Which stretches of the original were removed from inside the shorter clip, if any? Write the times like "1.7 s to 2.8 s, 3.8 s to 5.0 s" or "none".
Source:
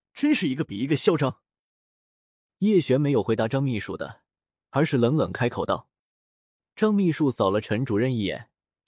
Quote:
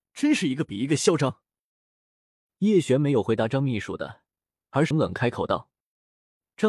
4.9 s to 5.1 s